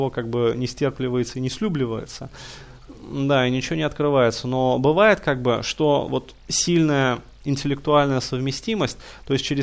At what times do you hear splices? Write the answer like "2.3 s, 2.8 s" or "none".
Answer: 6.4 s

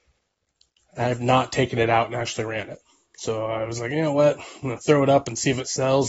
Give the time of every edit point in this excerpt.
none

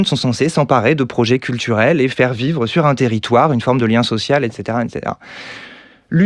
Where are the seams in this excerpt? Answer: none

